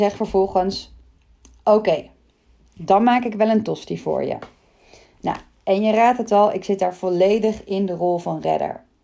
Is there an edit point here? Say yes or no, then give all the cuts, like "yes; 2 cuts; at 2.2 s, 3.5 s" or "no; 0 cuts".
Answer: no; 0 cuts